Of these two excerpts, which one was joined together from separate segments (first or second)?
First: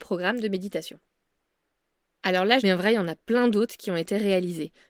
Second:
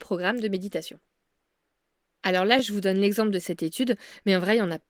first